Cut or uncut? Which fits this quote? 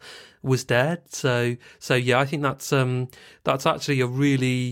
uncut